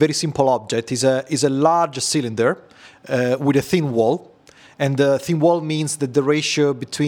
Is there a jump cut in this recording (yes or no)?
no